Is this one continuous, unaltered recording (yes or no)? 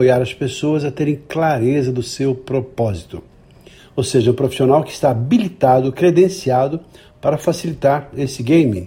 no